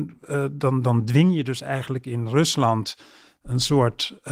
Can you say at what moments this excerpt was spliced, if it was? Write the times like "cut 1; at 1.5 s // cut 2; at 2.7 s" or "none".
none